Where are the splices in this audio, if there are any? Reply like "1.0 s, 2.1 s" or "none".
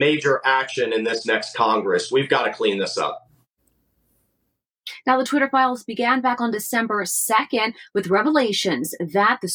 none